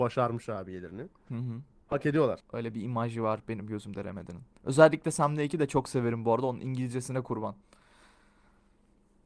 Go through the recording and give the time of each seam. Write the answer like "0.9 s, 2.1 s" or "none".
2.4 s